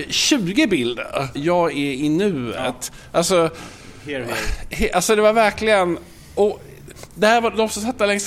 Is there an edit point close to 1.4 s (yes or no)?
yes